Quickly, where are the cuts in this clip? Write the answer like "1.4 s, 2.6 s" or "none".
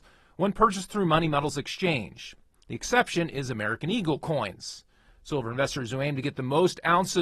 none